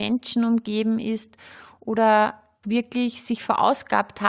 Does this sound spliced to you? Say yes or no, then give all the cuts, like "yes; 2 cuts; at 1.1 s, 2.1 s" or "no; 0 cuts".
yes; 1 cut; at 2.6 s